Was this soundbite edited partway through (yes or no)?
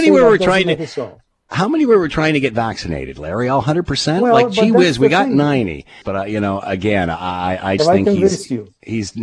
yes